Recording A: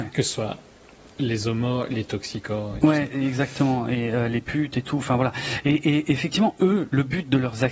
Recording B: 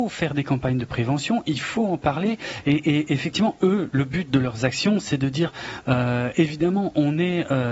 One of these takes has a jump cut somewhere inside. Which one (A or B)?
B